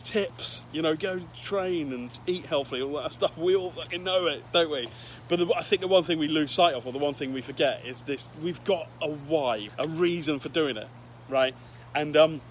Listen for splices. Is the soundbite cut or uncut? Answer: cut